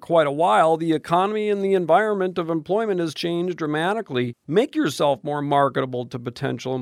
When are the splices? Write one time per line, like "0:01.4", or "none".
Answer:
none